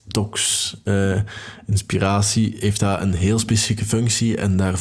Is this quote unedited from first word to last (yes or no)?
yes